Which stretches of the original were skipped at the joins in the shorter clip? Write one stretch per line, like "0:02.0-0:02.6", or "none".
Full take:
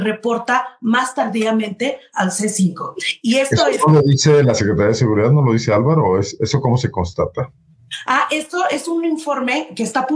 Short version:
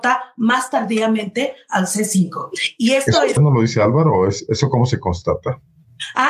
0:03.8-0:05.3